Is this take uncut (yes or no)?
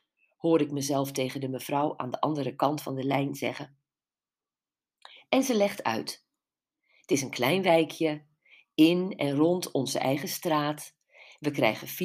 yes